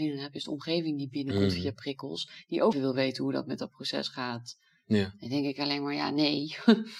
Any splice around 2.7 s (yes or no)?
yes